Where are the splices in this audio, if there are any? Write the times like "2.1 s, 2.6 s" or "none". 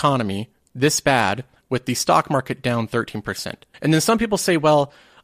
3.7 s